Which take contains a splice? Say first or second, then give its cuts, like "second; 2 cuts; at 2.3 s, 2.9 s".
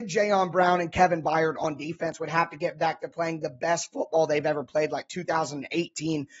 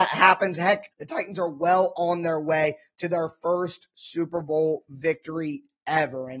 second; 1 cut; at 0.9 s